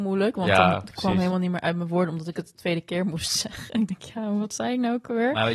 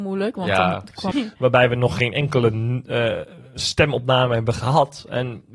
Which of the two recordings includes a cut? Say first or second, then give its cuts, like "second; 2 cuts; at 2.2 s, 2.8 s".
second; 1 cut; at 1.1 s